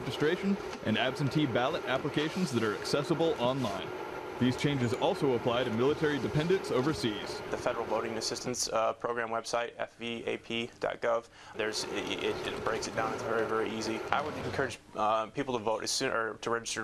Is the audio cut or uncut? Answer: cut